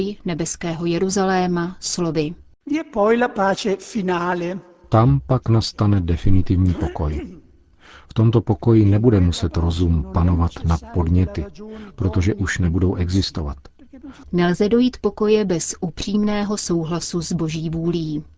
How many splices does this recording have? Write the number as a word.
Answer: one